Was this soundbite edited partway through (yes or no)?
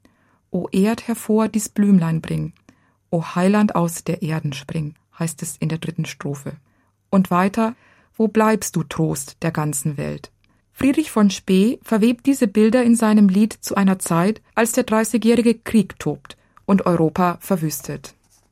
yes